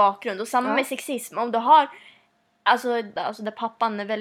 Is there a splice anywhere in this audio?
yes; 1 cut; at 3.2 s

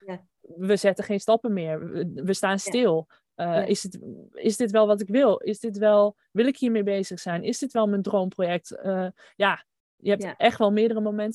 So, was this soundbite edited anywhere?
no; 0 cuts

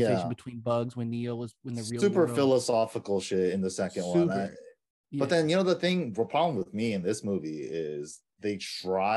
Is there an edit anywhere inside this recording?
no; 0 cuts

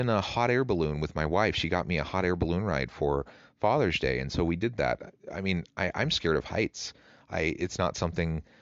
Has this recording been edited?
no; 0 cuts

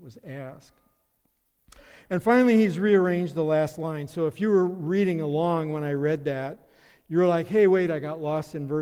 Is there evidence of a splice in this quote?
no; 0 cuts

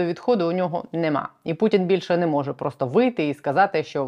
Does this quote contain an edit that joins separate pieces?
no; 0 cuts

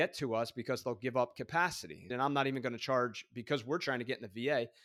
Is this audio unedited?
no; 1 cut; at 2.1 s

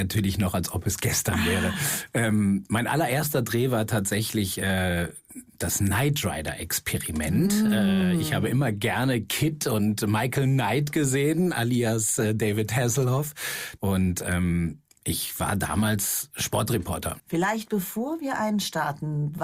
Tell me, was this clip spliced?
yes; 2 cuts; at 13.8 s, 17.2 s

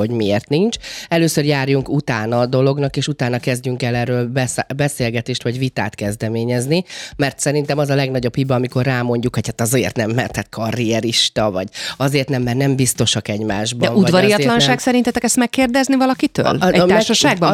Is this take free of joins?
yes; 0 cuts

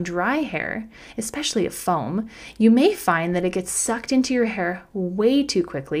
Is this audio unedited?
yes; 0 cuts

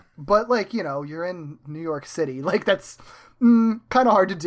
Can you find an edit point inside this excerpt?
no; 0 cuts

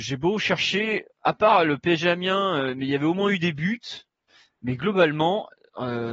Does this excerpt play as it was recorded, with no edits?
yes; 0 cuts

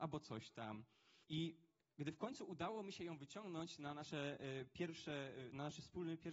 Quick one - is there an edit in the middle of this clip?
yes; 1 cut; at 1.2 s

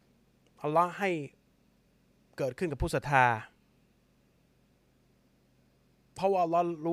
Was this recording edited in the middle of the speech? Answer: no; 0 cuts

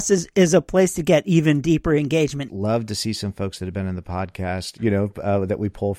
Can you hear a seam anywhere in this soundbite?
yes; 2 cuts; at 2.5 s, 4.8 s

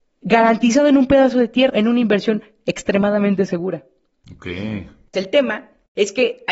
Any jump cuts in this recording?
yes; 2 cuts; at 1.7 s, 5.1 s

